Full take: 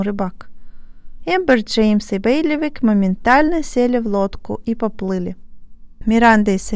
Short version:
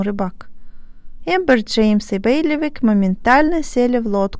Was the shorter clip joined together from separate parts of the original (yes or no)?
no